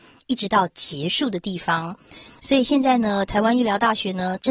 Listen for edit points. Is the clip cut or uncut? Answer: cut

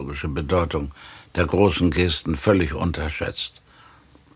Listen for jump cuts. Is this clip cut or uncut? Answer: uncut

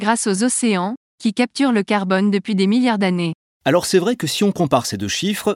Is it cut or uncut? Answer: cut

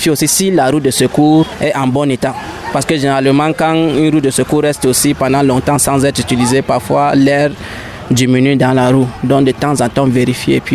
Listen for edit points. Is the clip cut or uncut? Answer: uncut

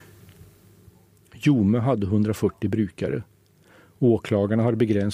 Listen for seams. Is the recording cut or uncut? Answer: uncut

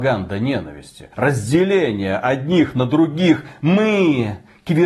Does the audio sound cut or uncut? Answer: cut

